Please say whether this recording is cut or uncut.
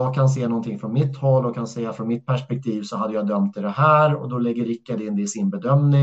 uncut